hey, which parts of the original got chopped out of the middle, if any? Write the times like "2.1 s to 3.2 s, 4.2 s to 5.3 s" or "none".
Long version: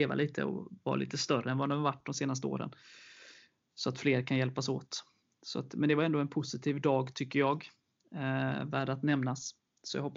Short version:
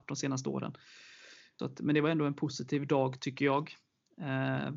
3.6 s to 5.5 s